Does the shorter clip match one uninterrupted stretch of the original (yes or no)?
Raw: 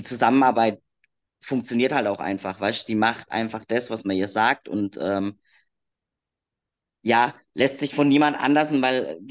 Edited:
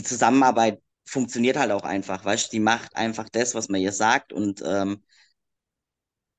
no